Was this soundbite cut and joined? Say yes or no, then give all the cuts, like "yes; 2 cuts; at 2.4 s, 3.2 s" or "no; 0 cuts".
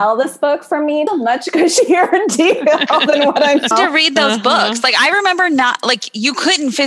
yes; 2 cuts; at 1.1 s, 3.7 s